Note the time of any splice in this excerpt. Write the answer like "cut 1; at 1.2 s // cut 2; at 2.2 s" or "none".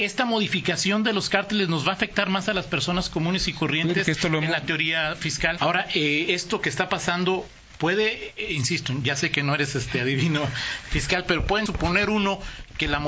cut 1; at 5.6 s // cut 2; at 11.7 s